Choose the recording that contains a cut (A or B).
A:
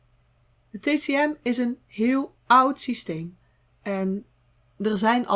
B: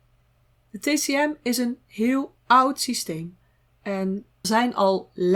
B